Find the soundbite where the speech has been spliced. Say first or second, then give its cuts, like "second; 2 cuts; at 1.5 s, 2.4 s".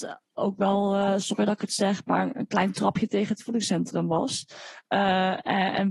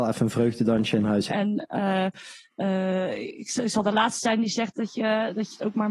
second; 1 cut; at 1.3 s